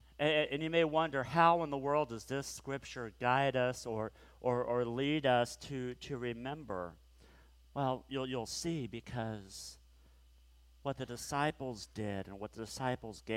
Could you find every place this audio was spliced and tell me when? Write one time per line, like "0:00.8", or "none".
none